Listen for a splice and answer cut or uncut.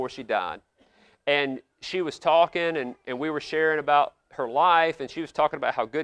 cut